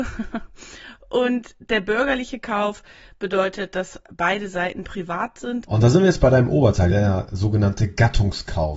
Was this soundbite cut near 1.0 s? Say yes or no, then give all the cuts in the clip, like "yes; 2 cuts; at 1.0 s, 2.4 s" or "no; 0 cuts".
no; 2 cuts; at 5.6 s, 6.9 s